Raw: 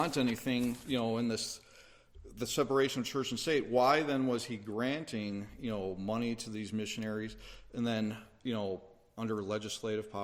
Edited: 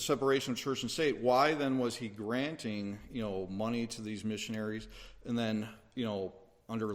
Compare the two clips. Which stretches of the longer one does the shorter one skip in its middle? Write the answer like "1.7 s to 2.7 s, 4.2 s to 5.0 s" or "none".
none